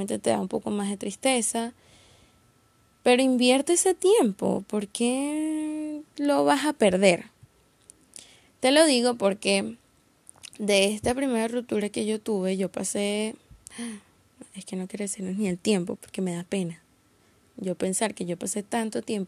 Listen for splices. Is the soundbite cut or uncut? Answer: cut